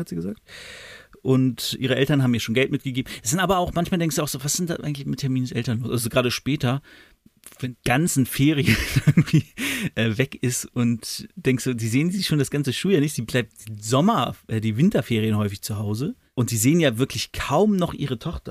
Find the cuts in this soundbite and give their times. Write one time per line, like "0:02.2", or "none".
none